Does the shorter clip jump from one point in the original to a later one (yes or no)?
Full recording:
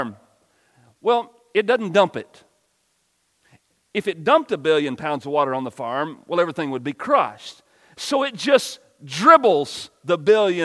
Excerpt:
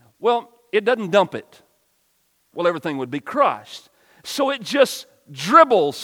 yes